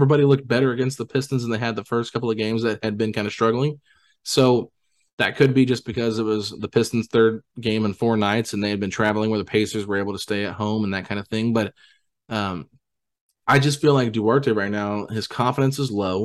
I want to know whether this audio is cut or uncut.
uncut